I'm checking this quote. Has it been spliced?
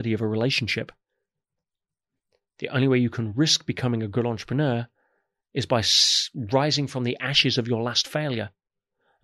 no; 0 cuts

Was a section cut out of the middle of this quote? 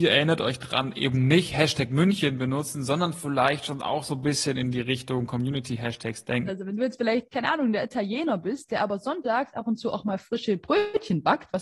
yes; 1 cut; at 6.5 s

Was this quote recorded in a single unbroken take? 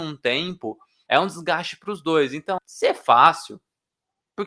no; 2 cuts; at 1.1 s, 2.6 s

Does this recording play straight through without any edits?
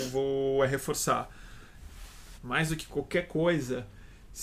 no; 1 cut; at 2.4 s

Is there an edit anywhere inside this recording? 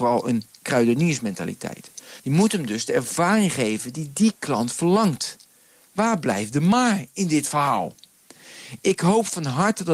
yes; 1 cut; at 2.2 s

